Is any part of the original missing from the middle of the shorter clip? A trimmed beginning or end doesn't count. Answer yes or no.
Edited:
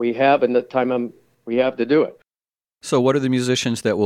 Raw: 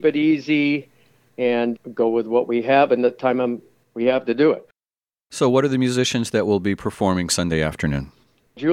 no